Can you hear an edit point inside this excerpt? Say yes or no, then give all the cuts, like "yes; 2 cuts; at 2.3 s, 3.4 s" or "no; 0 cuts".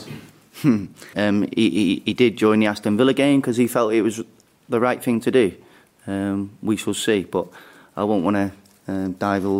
yes; 1 cut; at 1.1 s